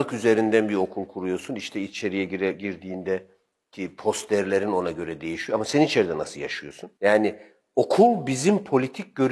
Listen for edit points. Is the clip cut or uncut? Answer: uncut